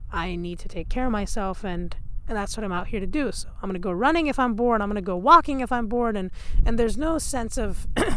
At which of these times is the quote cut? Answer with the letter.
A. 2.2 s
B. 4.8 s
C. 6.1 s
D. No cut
D